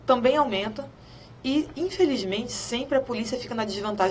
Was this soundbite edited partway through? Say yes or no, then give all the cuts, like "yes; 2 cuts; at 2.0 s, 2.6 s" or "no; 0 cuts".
no; 0 cuts